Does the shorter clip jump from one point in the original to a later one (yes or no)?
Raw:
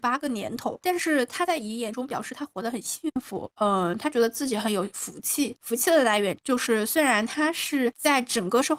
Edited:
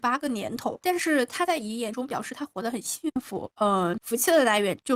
yes